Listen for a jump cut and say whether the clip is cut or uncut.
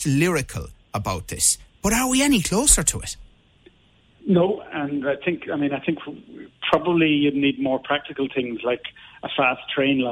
uncut